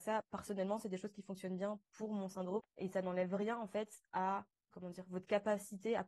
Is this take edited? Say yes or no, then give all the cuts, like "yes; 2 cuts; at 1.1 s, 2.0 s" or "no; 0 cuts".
yes; 2 cuts; at 2.6 s, 4.7 s